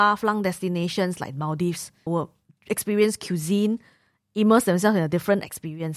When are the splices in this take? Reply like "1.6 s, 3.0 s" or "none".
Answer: 2.1 s